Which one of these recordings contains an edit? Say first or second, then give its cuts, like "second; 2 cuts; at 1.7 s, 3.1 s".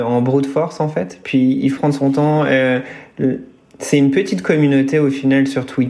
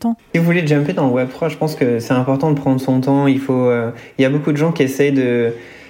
first; 1 cut; at 1.8 s